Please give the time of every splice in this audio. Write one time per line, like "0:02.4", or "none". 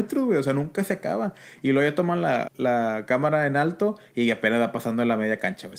0:02.5

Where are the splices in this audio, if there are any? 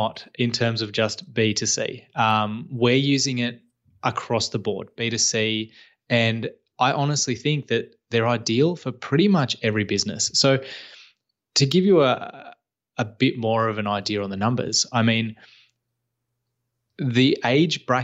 0:05.0

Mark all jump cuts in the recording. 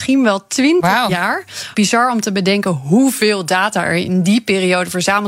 0:01.7

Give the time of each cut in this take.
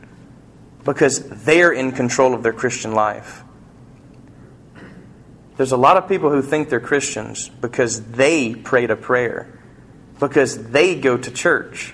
0:05.4

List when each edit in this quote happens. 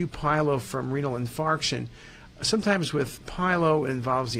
0:03.2

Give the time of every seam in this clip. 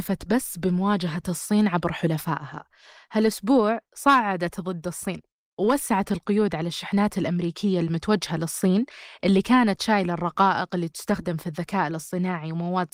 none

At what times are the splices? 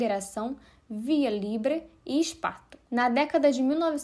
0:02.8

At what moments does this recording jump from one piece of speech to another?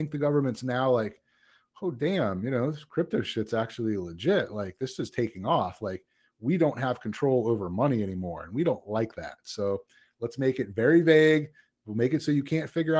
none

